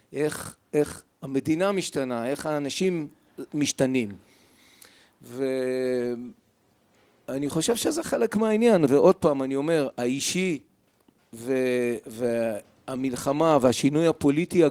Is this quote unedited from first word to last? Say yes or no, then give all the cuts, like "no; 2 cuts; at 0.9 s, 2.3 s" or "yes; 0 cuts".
no; 1 cut; at 12.0 s